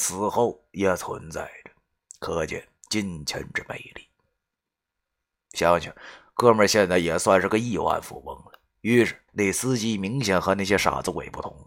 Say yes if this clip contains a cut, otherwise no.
yes